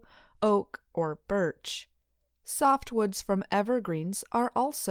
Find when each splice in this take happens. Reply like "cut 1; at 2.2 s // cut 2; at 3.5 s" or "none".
cut 1; at 0.9 s